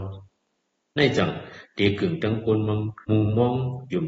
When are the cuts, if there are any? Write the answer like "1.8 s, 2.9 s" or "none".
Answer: 3.0 s